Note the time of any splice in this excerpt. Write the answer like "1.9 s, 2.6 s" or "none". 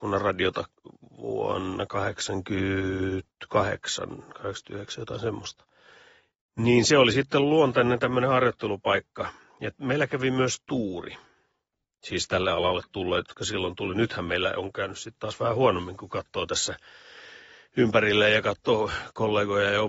none